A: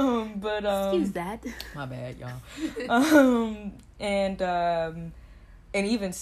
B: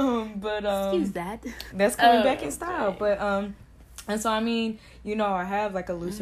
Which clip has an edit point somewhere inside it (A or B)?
B